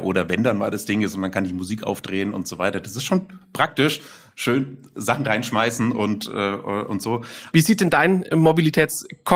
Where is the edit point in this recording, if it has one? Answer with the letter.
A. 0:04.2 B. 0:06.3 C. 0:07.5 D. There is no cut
C